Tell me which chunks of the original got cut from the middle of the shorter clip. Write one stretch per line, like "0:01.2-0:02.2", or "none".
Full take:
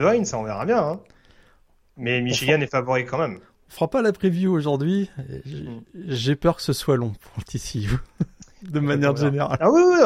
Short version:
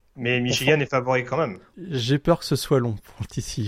0:03.5-0:05.9